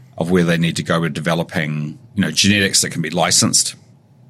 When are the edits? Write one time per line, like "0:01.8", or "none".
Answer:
0:02.1